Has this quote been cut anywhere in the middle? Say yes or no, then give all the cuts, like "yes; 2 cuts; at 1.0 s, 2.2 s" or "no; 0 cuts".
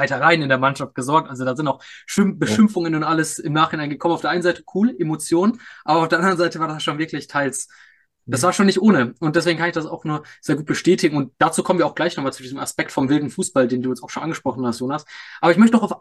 no; 0 cuts